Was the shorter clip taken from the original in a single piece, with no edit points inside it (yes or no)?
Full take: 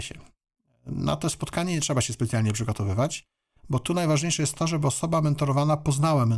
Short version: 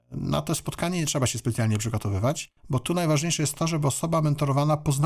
no